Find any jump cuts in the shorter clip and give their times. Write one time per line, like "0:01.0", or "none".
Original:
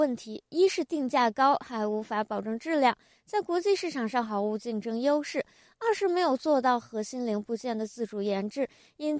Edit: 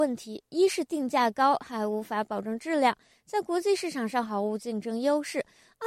none